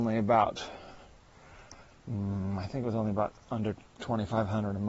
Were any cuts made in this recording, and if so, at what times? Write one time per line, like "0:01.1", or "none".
none